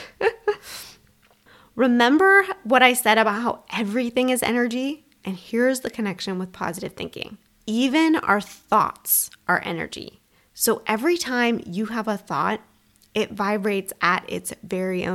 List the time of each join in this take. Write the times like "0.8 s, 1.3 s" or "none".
5.2 s